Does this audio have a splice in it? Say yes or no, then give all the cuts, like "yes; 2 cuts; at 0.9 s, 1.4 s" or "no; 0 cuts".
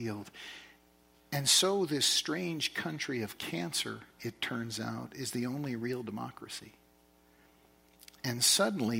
no; 0 cuts